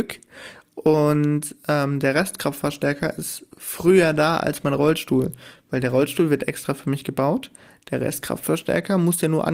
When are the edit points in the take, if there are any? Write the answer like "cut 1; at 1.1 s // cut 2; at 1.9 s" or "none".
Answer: none